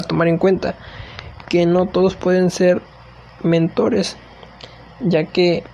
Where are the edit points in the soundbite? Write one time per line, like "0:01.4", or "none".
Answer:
none